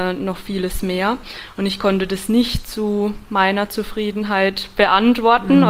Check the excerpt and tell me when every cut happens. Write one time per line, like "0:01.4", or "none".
none